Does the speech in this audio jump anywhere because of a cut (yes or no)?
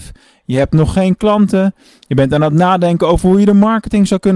no